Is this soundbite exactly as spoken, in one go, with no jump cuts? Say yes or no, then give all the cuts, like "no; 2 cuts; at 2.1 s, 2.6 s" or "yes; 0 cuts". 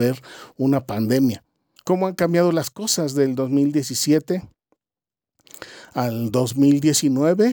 no; 1 cut; at 1.8 s